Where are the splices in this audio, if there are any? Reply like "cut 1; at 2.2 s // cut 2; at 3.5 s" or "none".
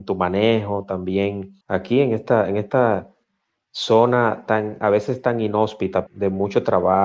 cut 1; at 1.6 s // cut 2; at 6.1 s